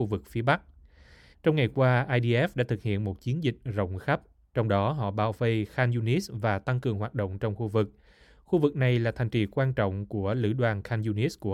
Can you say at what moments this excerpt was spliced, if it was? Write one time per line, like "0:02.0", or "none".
0:01.3

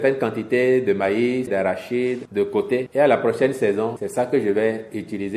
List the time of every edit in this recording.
0:01.5

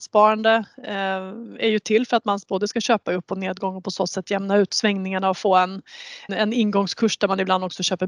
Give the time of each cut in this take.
0:06.3

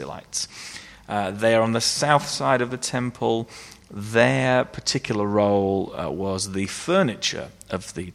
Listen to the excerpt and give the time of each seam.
none

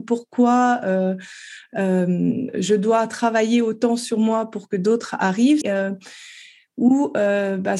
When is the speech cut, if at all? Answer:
0:05.6

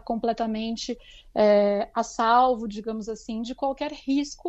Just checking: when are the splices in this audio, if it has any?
none

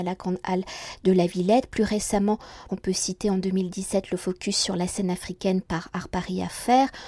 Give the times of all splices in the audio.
0:02.7

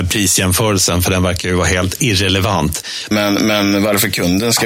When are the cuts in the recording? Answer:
0:03.1

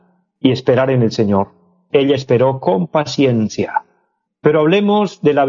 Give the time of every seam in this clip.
0:01.9
0:04.3

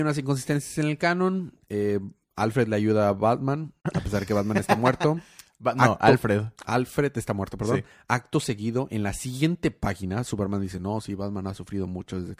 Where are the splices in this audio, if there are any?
none

